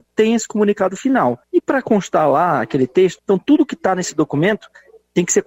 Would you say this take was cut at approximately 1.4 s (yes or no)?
yes